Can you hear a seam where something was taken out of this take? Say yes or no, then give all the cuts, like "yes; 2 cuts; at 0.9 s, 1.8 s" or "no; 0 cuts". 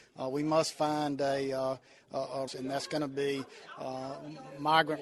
yes; 1 cut; at 2.5 s